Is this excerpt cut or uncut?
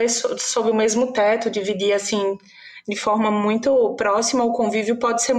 uncut